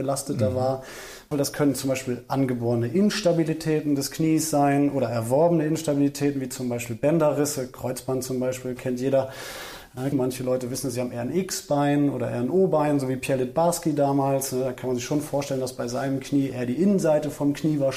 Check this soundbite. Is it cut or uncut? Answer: cut